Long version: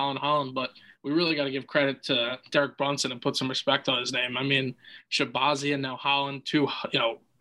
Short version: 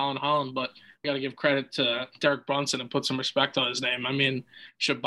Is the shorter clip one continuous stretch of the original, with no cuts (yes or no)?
no